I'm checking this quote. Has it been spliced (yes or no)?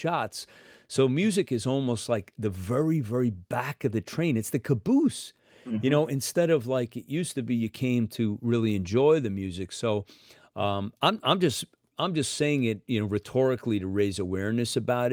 no